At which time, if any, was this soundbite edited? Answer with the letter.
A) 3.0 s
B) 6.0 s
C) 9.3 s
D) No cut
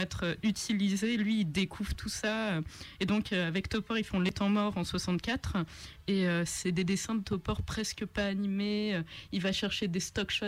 D